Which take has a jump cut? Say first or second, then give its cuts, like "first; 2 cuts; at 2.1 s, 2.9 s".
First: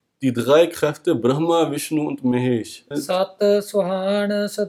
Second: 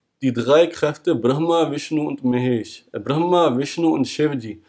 first; 1 cut; at 2.9 s